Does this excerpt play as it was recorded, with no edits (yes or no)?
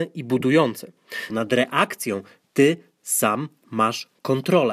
no